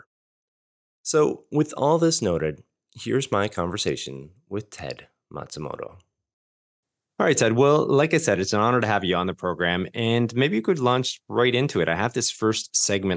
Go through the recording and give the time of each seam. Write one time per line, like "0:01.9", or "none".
0:07.0